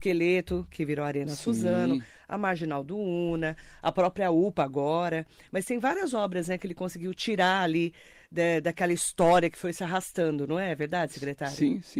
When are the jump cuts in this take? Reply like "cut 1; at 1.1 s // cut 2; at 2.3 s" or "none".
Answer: none